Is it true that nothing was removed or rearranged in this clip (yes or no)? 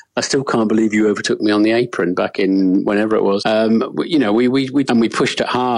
no